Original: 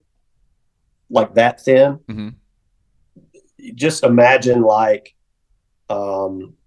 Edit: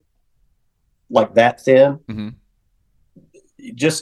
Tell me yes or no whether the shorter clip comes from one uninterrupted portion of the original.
yes